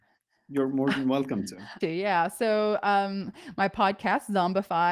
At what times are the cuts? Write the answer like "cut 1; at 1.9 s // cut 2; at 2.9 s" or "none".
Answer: cut 1; at 1.8 s